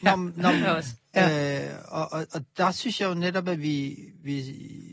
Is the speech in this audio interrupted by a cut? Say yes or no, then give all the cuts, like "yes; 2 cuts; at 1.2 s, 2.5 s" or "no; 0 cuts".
no; 0 cuts